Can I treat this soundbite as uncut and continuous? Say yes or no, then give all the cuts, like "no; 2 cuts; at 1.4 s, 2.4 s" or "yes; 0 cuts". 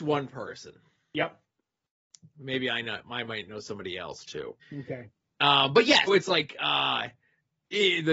no; 2 cuts; at 4.6 s, 6.1 s